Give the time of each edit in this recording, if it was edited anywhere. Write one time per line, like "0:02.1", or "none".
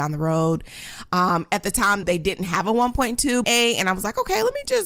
0:02.0
0:03.4